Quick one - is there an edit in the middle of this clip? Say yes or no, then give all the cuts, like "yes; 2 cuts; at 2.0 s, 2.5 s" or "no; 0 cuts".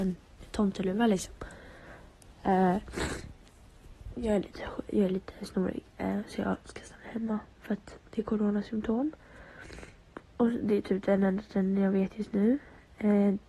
no; 0 cuts